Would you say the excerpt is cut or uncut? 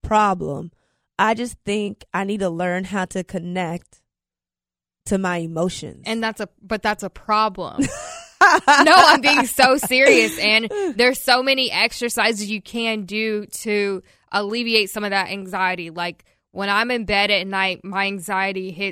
uncut